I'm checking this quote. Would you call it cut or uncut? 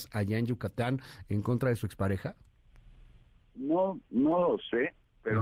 uncut